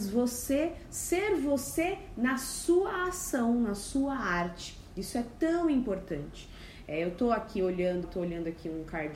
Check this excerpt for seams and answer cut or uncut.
cut